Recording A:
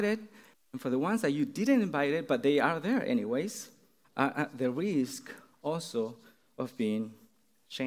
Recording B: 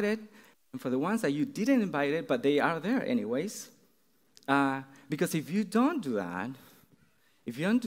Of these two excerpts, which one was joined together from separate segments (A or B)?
A